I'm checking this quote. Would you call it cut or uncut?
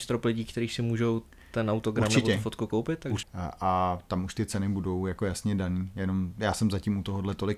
cut